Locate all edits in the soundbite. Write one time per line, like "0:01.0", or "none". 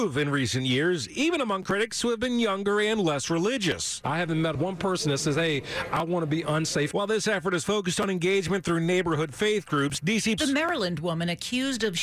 0:04.0
0:10.4